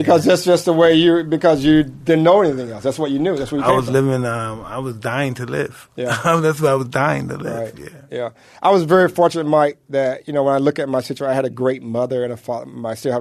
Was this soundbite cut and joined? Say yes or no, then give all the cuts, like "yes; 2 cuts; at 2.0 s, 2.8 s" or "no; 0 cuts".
no; 0 cuts